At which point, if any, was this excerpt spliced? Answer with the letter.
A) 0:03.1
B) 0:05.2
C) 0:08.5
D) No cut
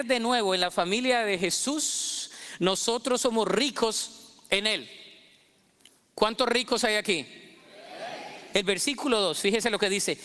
C